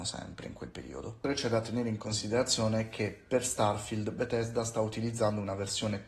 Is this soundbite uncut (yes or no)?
yes